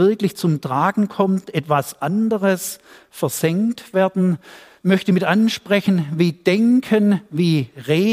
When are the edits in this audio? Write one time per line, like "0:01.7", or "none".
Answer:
none